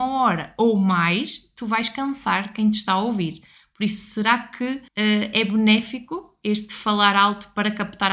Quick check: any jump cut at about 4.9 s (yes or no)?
yes